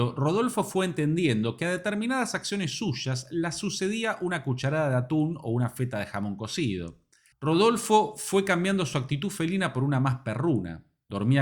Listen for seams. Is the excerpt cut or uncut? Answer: cut